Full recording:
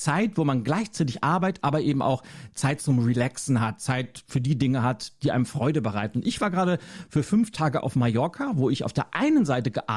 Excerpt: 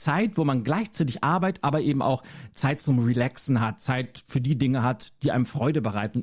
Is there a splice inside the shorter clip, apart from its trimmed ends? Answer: no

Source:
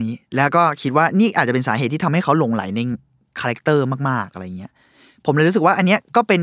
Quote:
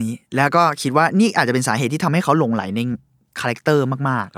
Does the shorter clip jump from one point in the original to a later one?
no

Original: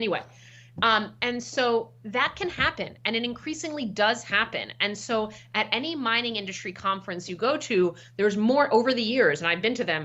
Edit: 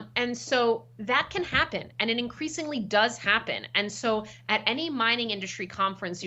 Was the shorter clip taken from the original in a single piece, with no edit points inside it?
yes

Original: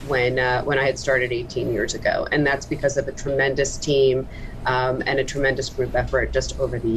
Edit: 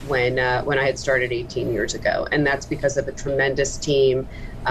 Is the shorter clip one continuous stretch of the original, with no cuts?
yes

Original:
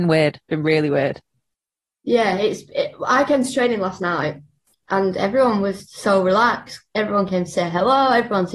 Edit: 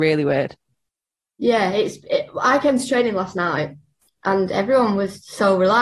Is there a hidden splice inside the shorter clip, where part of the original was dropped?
no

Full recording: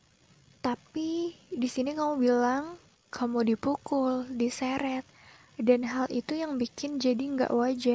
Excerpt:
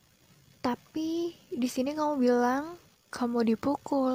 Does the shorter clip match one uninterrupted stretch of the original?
yes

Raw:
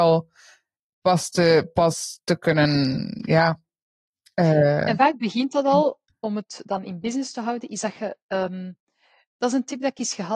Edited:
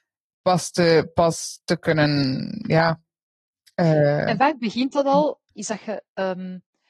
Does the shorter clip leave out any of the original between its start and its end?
yes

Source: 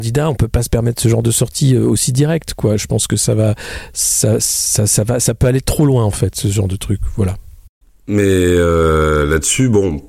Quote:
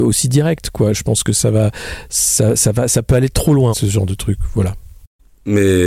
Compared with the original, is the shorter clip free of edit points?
no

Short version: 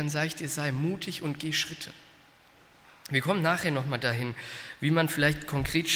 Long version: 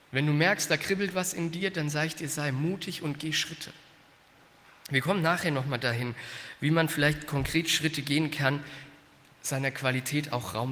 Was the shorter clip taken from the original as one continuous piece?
yes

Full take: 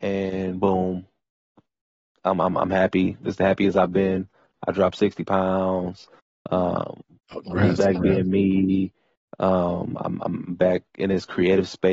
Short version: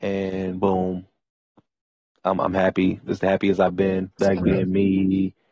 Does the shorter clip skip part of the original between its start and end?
yes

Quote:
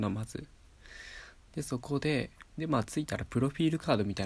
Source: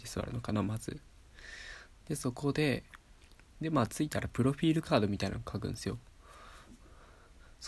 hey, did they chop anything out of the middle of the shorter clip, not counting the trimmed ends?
yes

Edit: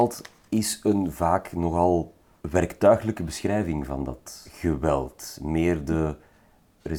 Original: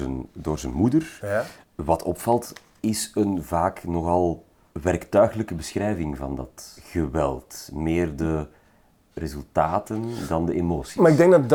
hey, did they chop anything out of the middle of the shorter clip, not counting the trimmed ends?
no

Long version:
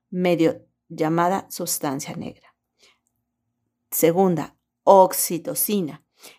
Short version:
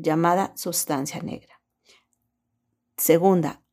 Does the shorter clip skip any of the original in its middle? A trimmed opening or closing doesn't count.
no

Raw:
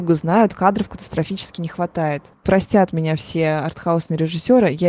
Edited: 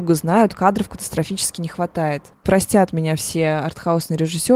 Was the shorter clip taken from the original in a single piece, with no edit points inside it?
yes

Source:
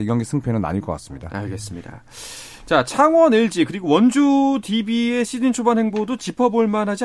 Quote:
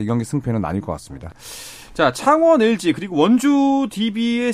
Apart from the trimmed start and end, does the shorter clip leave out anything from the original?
yes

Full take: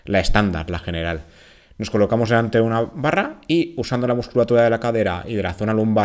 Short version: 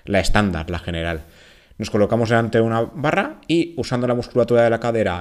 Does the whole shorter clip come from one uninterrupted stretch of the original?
yes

